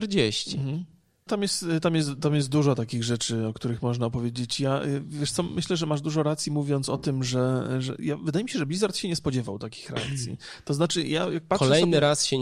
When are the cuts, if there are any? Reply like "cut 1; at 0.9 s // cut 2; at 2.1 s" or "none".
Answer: cut 1; at 1.3 s